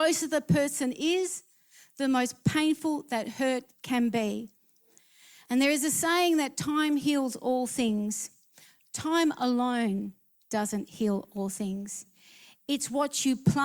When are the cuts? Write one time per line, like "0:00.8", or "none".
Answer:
none